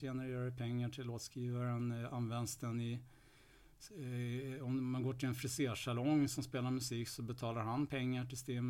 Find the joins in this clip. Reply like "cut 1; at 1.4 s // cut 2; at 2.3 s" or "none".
none